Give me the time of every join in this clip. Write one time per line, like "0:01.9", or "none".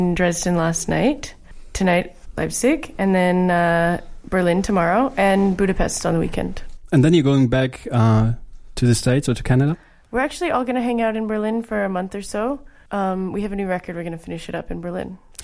none